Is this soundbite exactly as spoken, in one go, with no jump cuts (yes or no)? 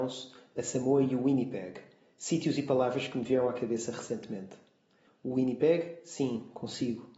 no